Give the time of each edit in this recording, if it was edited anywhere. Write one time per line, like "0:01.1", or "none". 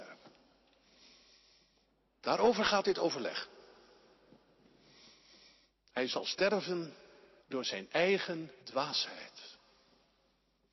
0:07.4
0:08.6